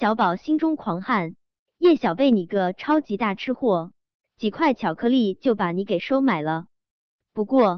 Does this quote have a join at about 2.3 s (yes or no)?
no